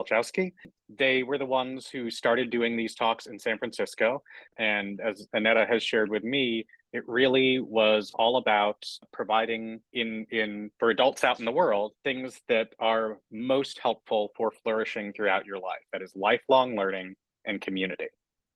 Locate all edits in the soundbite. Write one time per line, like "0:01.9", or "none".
0:09.8
0:11.9